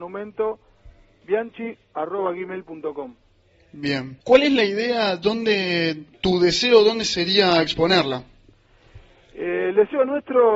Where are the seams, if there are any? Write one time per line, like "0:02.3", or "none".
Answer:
0:04.2
0:06.1